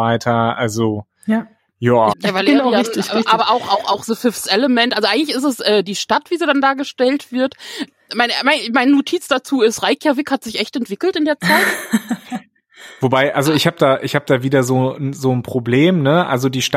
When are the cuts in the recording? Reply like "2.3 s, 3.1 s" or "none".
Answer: 2.1 s